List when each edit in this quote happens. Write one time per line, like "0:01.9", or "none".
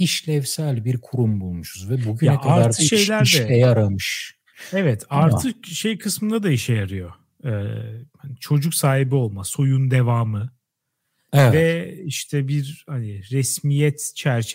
none

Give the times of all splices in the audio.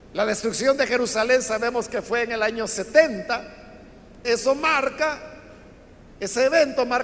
0:04.2

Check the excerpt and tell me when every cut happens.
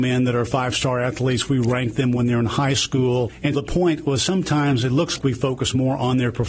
0:03.5
0:05.2

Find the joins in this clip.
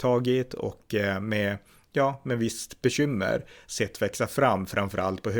none

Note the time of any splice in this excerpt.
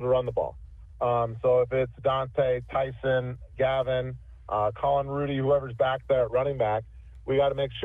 none

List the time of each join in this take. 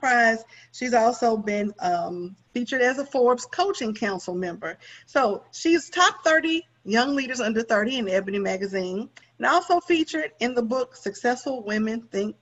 0:09.2

